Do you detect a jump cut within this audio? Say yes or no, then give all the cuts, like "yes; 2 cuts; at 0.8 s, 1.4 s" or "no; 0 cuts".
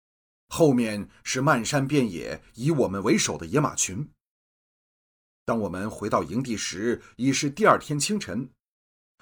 no; 0 cuts